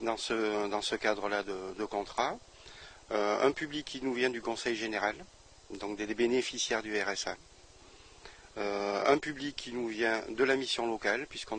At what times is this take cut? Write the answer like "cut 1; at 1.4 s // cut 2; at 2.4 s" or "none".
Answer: none